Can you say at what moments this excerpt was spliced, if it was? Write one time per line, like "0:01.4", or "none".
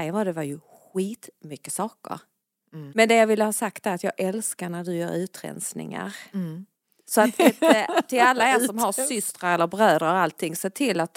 0:02.9